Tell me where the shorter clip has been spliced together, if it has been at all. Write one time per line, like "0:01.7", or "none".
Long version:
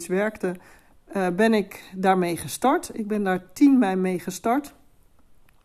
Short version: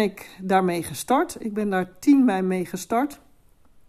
none